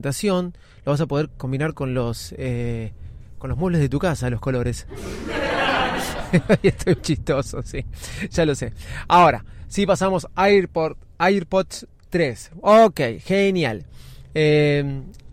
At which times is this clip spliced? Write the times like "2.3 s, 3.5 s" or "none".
7.0 s